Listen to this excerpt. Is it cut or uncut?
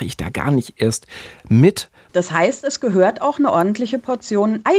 cut